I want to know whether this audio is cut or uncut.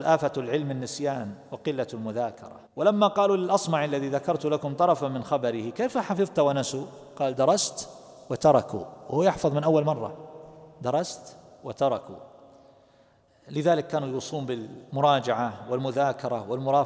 cut